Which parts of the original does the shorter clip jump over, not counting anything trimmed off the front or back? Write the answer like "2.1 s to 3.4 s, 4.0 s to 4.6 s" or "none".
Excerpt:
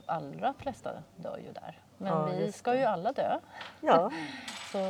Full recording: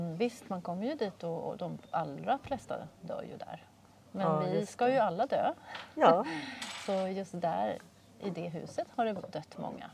3.7 s to 4.0 s